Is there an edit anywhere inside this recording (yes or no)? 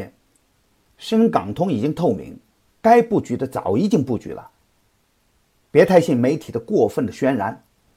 no